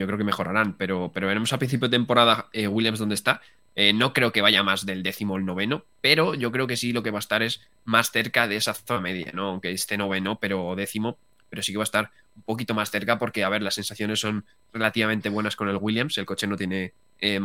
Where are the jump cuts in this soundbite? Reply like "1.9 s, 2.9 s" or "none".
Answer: none